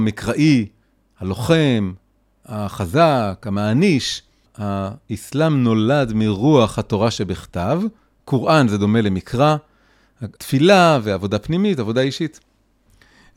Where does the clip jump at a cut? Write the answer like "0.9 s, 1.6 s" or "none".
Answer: 4.5 s, 10.4 s